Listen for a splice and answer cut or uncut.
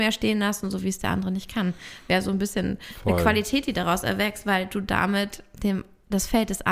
uncut